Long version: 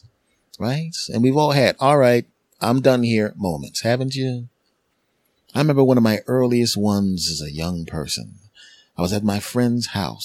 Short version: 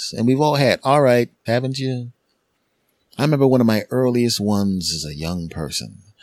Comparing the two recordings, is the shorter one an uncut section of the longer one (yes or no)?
no